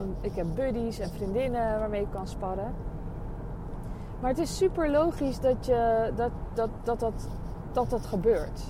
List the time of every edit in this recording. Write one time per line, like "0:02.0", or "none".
none